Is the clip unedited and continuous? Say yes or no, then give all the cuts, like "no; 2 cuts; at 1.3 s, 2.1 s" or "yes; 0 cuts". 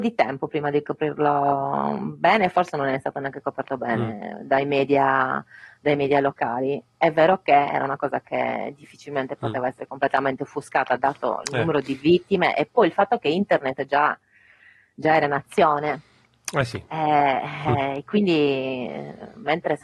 yes; 0 cuts